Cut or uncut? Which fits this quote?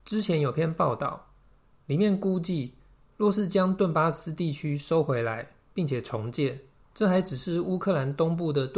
cut